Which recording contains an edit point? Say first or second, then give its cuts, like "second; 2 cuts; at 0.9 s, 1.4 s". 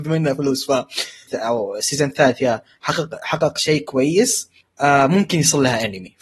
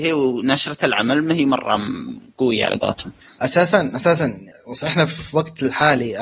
first; 1 cut; at 1.3 s